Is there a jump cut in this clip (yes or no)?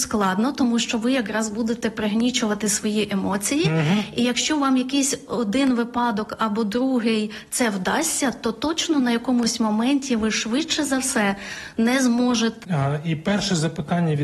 yes